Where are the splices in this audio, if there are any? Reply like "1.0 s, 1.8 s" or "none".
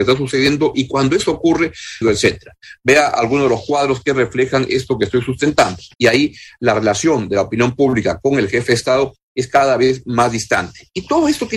2.0 s, 5.9 s